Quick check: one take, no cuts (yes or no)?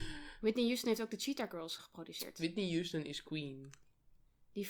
no